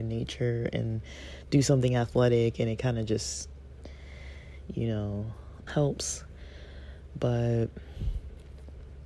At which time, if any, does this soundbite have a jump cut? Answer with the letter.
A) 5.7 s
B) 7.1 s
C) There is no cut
A